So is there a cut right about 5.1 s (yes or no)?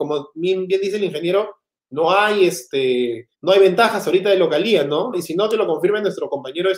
yes